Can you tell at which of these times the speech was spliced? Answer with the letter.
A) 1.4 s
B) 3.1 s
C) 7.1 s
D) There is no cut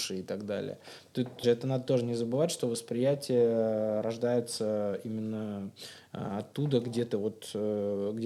A